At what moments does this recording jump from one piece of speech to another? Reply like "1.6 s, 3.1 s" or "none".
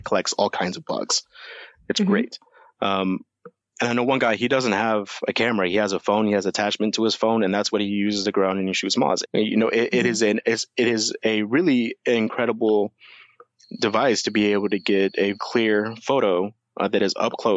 9.2 s, 15.4 s